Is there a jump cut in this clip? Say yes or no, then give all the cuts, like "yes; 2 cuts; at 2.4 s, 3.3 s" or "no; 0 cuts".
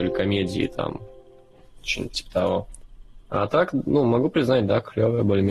no; 0 cuts